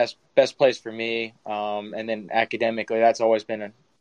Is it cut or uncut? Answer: uncut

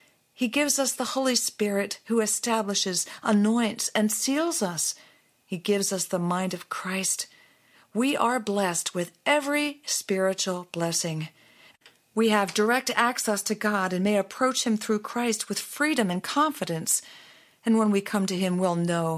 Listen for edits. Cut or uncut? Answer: uncut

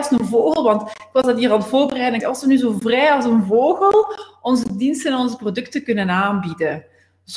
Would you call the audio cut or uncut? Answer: cut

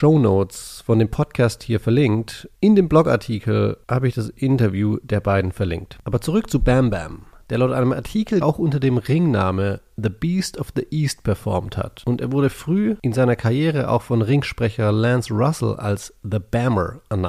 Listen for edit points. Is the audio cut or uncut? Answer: cut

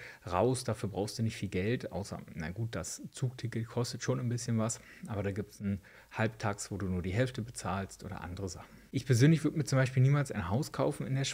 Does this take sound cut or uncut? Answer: uncut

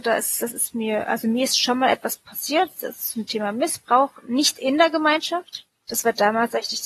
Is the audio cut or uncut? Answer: cut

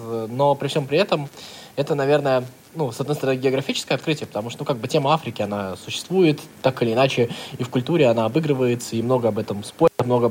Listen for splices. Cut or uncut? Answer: uncut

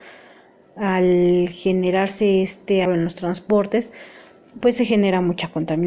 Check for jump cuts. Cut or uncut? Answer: cut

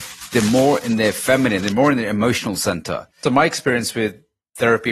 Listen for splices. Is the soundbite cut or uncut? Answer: cut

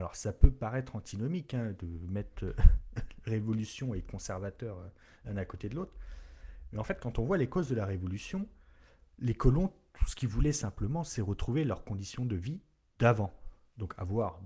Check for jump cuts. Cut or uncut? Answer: uncut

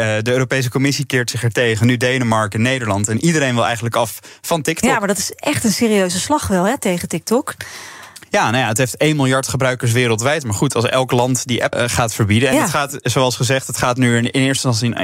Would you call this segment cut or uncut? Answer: cut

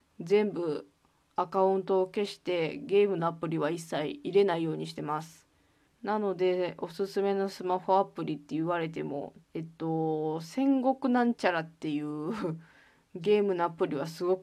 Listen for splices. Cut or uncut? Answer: cut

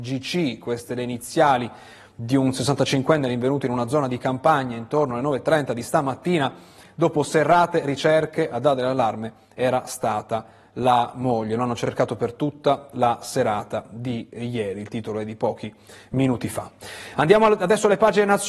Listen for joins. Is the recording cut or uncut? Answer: uncut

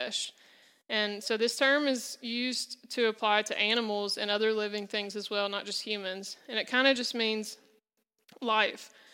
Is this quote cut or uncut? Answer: uncut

